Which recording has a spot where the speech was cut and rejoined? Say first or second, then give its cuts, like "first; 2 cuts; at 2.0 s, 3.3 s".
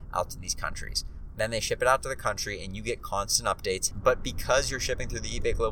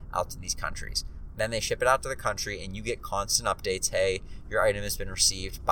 first; 1 cut; at 3.9 s